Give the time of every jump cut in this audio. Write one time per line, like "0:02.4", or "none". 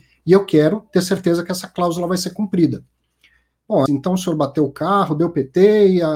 0:03.9

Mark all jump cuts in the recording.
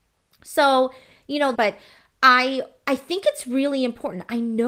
0:01.5

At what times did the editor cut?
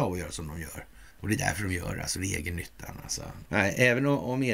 0:01.1
0:03.4

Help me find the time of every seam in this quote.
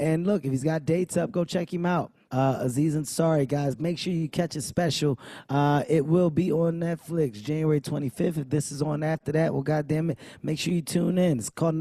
0:02.3

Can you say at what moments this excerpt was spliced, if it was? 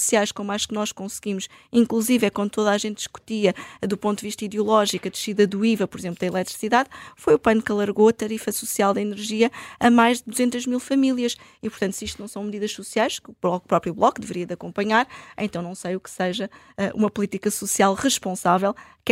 none

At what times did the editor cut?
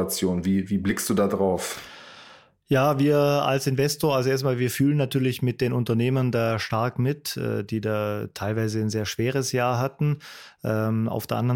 none

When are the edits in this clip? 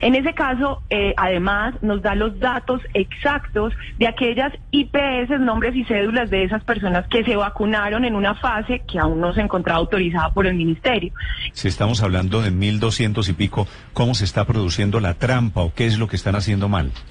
0:07.1
0:11.5

